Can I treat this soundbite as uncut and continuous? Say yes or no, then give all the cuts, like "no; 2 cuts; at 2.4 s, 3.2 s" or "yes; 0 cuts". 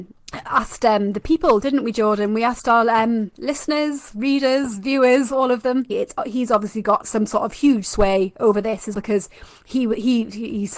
no; 3 cuts; at 5.9 s, 7.0 s, 8.9 s